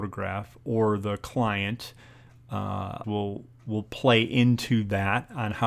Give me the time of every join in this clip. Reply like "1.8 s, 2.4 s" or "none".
3.0 s